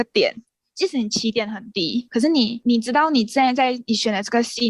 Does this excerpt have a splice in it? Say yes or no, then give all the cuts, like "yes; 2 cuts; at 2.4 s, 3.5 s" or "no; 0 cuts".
no; 0 cuts